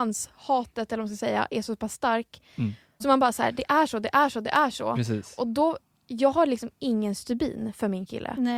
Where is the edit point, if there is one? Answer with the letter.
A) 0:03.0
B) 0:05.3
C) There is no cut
A